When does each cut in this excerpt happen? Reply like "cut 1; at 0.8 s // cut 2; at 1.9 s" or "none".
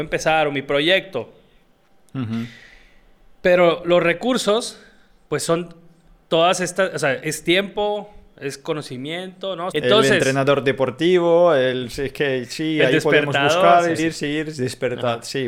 cut 1; at 9.7 s // cut 2; at 14.0 s